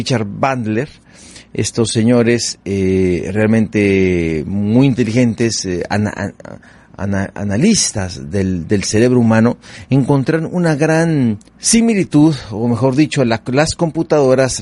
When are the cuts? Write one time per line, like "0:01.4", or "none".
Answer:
0:11.5